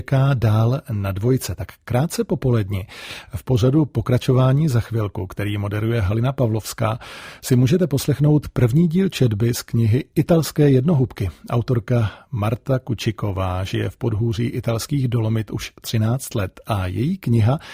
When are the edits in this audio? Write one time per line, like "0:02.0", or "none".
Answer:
none